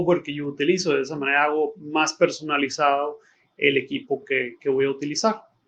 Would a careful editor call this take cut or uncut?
uncut